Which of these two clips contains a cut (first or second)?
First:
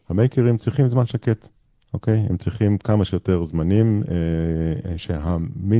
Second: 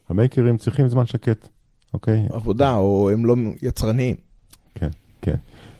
second